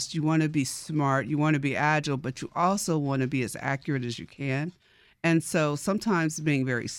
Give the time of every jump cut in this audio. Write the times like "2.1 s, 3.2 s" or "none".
none

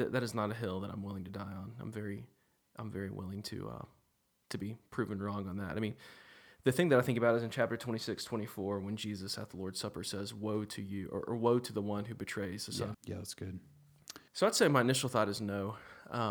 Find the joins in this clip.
12.9 s, 14.3 s

